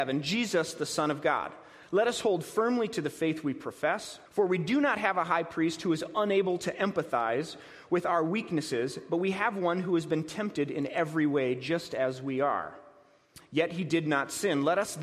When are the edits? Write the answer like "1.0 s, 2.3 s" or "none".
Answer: 4.3 s